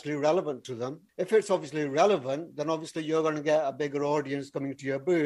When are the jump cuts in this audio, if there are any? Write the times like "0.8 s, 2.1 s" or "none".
none